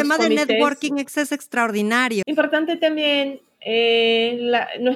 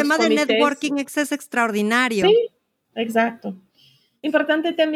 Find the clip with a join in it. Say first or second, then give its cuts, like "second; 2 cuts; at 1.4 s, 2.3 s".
first; 1 cut; at 2.2 s